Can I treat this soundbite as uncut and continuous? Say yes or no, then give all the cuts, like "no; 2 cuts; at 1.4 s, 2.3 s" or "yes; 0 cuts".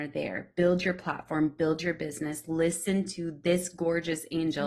yes; 0 cuts